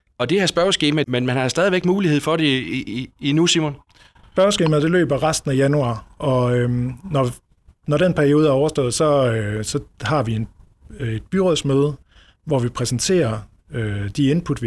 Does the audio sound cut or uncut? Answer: cut